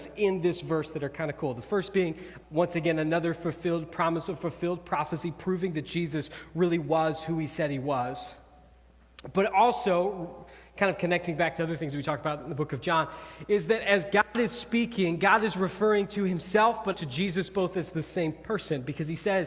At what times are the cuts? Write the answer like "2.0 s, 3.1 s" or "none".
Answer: 2.4 s, 16.9 s